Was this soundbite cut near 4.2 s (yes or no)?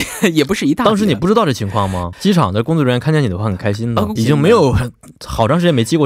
yes